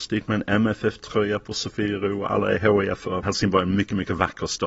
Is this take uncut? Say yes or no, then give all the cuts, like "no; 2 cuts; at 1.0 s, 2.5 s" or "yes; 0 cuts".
no; 1 cut; at 3.2 s